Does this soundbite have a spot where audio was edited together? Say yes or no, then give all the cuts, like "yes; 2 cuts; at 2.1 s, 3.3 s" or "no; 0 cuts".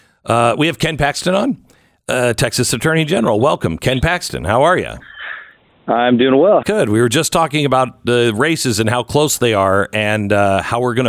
yes; 1 cut; at 6.6 s